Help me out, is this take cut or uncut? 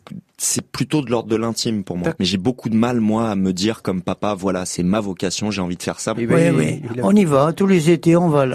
cut